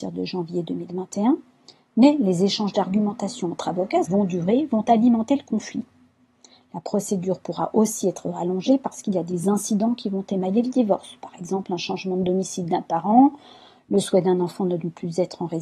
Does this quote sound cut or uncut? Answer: cut